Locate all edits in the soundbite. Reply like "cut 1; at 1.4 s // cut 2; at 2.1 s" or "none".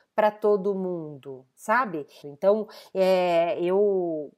cut 1; at 2.2 s